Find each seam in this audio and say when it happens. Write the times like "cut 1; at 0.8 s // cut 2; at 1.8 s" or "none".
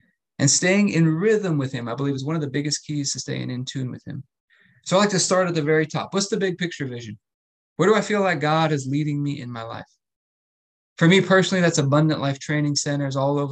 none

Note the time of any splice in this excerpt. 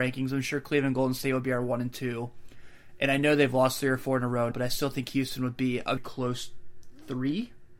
cut 1; at 4.5 s // cut 2; at 6.0 s

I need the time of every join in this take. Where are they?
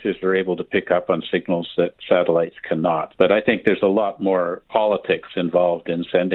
cut 1; at 3.1 s // cut 2; at 4.7 s

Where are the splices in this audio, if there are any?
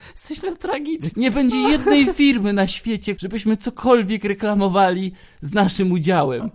cut 1; at 1.1 s // cut 2; at 3.2 s

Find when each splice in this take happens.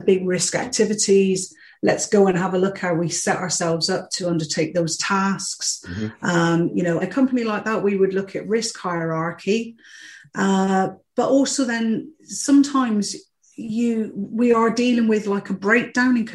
cut 1; at 7.0 s

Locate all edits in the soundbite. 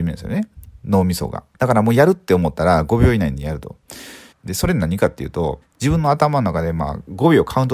cut 1; at 4.3 s // cut 2; at 5.6 s

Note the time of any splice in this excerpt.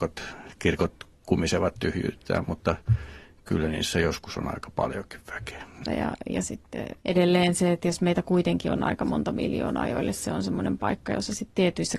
cut 1; at 5.9 s // cut 2; at 7.0 s

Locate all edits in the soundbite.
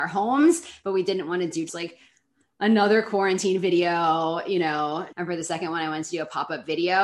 cut 1; at 1.7 s // cut 2; at 5.1 s

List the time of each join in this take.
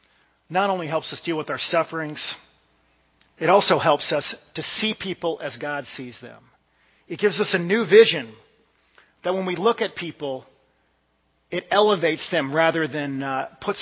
none

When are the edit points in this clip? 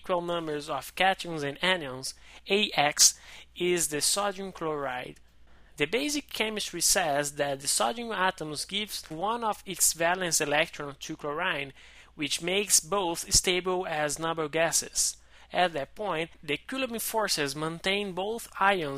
none

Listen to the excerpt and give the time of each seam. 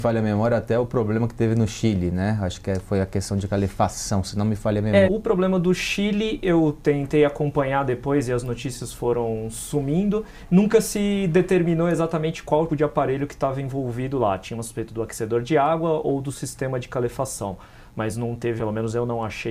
cut 1; at 5.0 s // cut 2; at 12.7 s // cut 3; at 18.6 s

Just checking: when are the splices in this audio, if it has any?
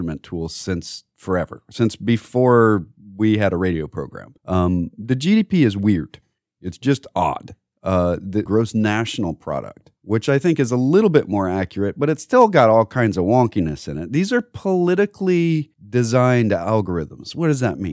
cut 1; at 8.5 s

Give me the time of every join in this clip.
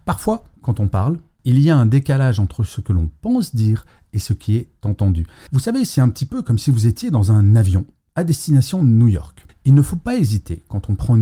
cut 1; at 5.5 s // cut 2; at 9.5 s

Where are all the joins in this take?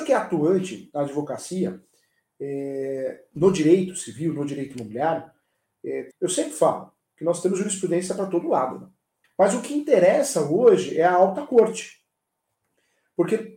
cut 1; at 6.1 s // cut 2; at 9.2 s

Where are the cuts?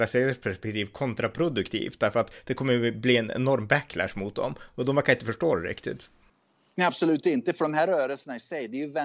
none

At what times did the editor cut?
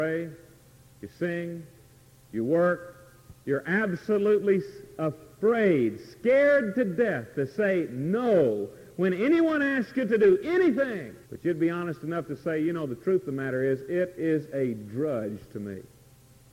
cut 1; at 3.4 s // cut 2; at 11.2 s

